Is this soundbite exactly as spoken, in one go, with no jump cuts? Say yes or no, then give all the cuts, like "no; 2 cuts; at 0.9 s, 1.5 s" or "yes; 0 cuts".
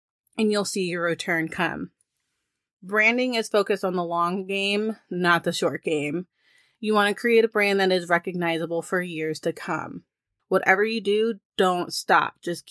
no; 1 cut; at 10.4 s